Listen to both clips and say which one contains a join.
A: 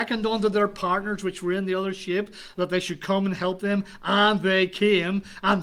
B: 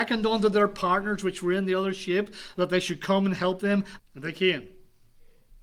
B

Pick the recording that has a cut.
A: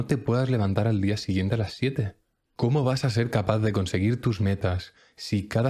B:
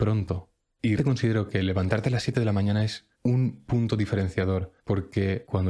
B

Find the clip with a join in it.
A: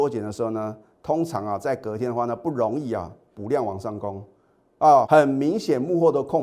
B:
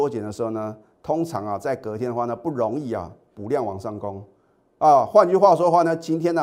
A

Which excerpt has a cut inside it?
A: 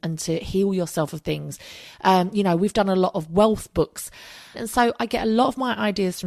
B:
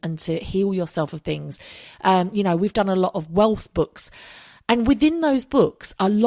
A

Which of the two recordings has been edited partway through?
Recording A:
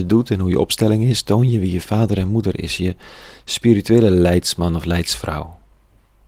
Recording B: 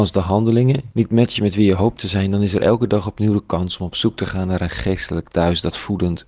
B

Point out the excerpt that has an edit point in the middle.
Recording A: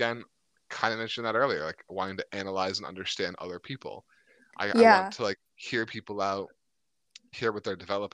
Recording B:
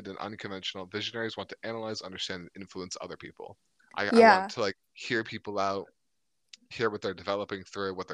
B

